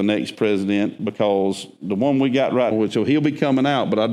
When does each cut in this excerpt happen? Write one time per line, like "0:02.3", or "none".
0:02.7